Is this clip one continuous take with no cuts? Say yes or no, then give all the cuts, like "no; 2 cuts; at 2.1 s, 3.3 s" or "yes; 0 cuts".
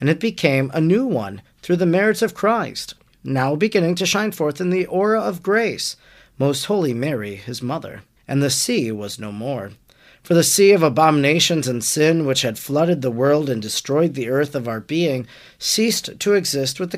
no; 1 cut; at 8.2 s